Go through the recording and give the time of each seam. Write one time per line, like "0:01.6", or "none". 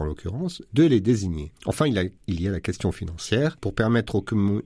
none